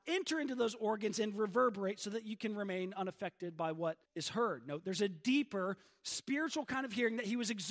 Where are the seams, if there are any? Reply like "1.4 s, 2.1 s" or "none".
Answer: 4.0 s